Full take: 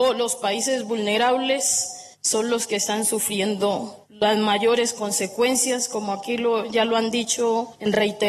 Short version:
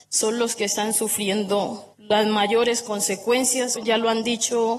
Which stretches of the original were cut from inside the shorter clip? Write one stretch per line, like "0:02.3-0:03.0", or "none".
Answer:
0:05.9-0:06.6